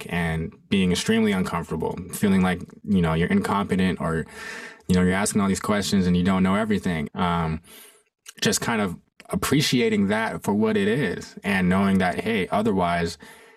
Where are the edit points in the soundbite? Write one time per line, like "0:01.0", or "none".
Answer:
0:07.1